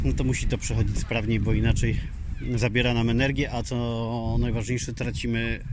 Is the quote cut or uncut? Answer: uncut